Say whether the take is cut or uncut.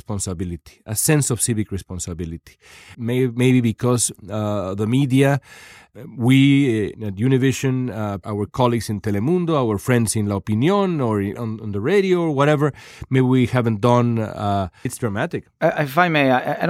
cut